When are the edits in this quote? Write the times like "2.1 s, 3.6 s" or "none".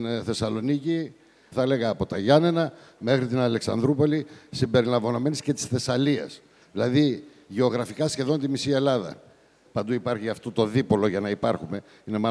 1.5 s, 9.6 s